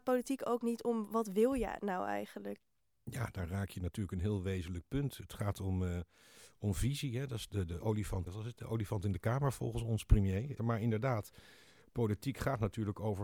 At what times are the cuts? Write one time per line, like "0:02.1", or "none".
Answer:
0:08.3
0:10.6